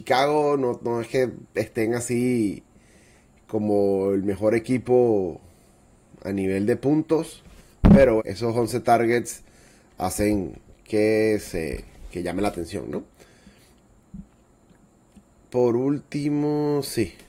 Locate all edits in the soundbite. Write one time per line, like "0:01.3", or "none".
0:08.2